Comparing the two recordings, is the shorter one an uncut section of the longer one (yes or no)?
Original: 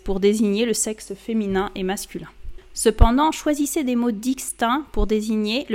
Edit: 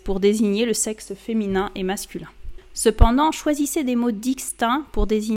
yes